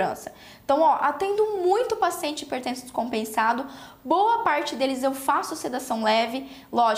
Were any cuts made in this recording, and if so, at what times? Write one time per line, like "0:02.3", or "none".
none